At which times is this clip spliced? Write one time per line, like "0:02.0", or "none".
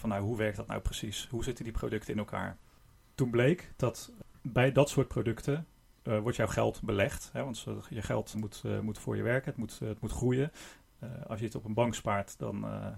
0:08.3